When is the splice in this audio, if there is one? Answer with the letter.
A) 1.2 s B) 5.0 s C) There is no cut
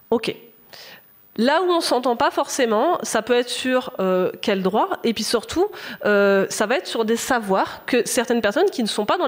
C